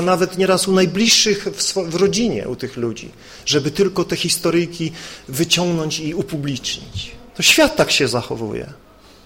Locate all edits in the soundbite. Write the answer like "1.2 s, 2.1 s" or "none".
7.3 s